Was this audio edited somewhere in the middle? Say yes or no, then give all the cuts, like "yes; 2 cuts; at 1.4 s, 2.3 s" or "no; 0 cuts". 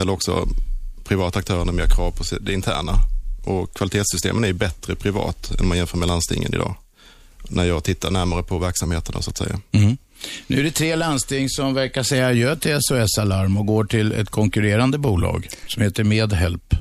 no; 0 cuts